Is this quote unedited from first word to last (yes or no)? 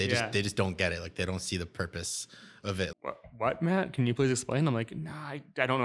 no